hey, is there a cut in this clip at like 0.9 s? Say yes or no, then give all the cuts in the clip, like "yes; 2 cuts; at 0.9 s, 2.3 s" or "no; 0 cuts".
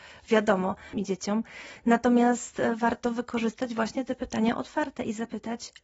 yes; 1 cut; at 0.9 s